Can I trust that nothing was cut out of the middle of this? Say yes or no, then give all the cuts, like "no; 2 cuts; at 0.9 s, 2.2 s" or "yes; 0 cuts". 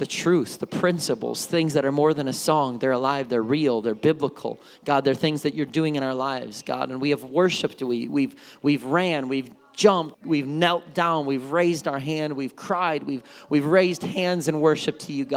no; 1 cut; at 10.1 s